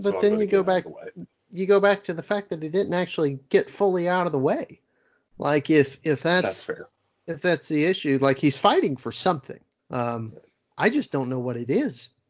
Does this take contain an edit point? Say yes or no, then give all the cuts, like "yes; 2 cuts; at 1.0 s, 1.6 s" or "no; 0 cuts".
yes; 1 cut; at 9.8 s